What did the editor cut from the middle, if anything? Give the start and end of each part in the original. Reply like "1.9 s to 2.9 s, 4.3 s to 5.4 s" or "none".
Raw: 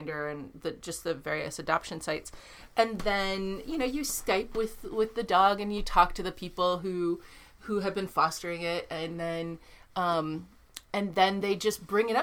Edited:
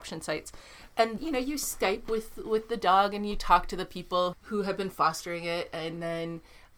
3.0 s to 3.6 s, 6.8 s to 7.5 s